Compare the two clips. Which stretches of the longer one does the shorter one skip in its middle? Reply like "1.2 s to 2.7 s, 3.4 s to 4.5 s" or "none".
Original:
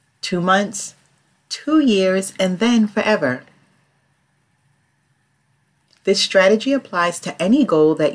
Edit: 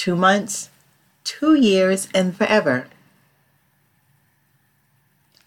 2.6 s to 2.9 s